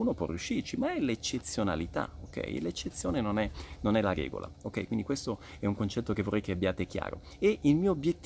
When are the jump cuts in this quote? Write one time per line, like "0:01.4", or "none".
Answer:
none